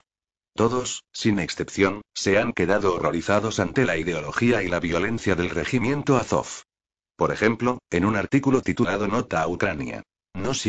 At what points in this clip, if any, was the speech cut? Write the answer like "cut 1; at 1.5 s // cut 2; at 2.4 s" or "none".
cut 1; at 7.8 s